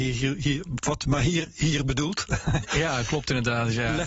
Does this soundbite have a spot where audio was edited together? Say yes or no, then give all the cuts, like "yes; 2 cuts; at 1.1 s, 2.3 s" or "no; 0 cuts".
no; 0 cuts